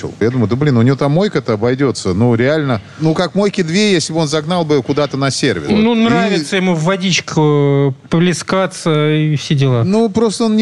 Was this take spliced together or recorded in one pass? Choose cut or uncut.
uncut